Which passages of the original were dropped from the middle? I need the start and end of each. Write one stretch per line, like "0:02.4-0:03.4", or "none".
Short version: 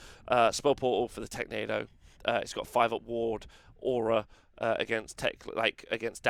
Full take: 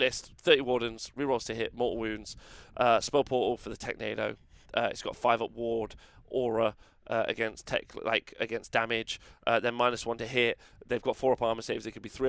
none